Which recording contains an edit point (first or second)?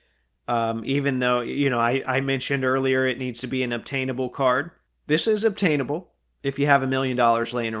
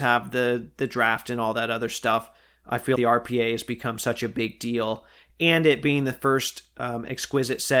second